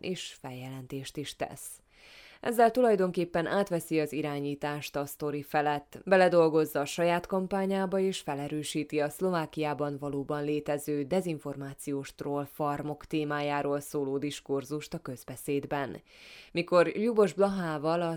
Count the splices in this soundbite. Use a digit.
1